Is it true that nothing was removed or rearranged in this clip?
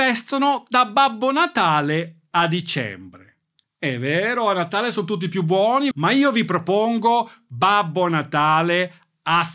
no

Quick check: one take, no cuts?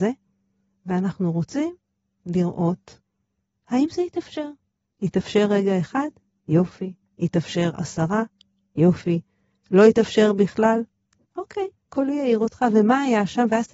no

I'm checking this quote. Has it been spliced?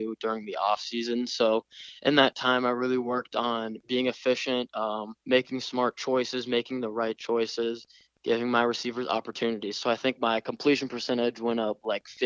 yes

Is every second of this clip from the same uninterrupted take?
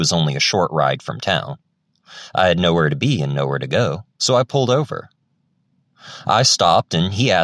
no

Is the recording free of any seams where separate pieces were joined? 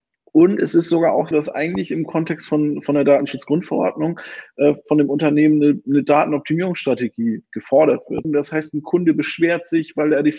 no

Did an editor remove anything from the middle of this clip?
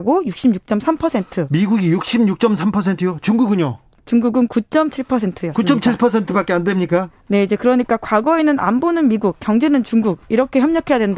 no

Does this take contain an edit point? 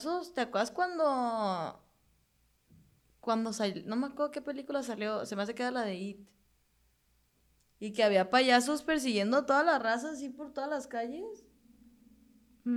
no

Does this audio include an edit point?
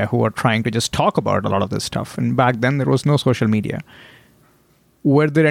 no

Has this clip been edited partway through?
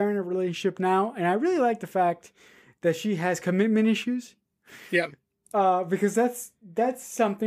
no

